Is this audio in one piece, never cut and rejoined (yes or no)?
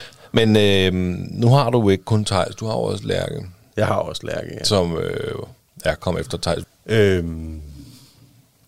no